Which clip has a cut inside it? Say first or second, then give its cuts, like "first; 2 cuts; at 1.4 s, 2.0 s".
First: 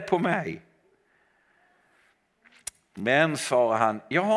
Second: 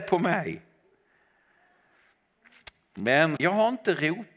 second; 1 cut; at 3.4 s